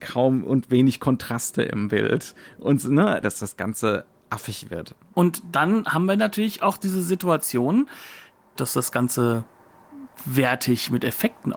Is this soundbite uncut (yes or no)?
no